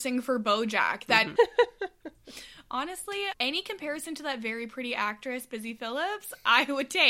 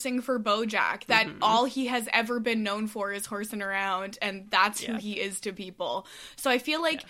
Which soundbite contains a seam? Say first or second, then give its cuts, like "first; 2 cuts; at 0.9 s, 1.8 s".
first; 1 cut; at 1.4 s